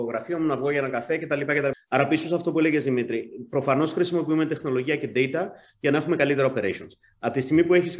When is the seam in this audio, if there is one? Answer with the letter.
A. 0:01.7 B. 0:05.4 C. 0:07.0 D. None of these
A